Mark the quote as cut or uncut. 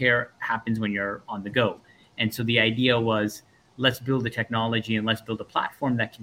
uncut